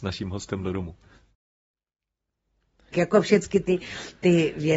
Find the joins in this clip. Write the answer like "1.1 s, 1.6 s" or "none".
2.9 s